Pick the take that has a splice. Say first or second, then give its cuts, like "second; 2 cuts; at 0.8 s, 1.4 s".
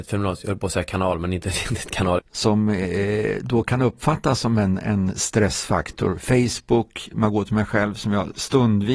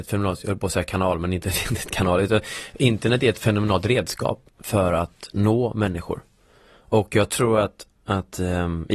first; 1 cut; at 2.2 s